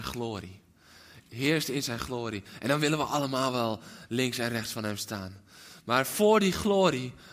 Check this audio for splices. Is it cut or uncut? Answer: uncut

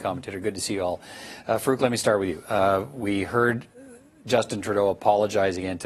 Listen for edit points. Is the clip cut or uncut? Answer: uncut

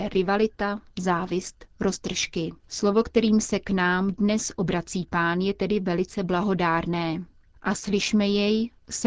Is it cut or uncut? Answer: cut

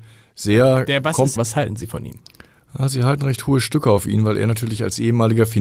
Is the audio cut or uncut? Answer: cut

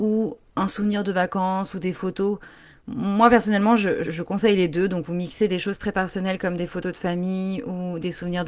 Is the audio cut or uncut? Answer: cut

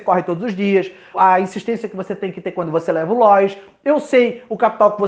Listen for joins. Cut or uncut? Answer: cut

